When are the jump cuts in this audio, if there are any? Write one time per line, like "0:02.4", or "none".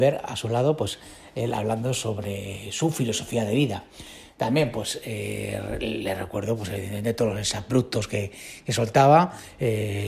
none